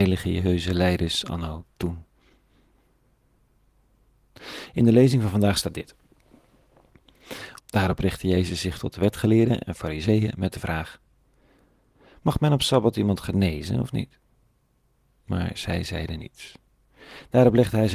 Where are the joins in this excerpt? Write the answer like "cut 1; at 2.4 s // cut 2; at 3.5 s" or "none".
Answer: cut 1; at 7.6 s